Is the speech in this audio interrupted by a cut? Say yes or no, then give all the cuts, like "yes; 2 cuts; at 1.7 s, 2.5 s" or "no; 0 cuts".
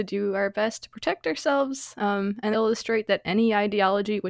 yes; 1 cut; at 2.5 s